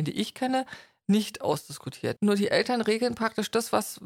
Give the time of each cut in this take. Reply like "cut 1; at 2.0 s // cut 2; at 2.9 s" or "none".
cut 1; at 2.2 s